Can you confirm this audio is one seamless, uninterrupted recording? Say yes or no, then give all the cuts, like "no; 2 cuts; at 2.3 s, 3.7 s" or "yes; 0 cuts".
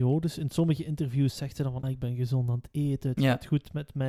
no; 1 cut; at 1.8 s